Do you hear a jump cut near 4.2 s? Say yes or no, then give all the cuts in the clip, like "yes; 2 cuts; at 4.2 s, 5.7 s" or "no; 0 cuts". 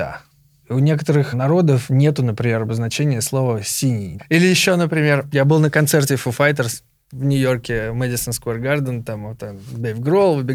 yes; 1 cut; at 4.2 s